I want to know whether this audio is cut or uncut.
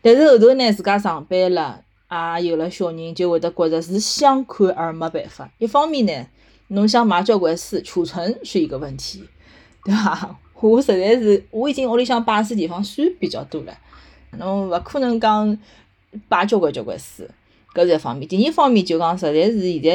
cut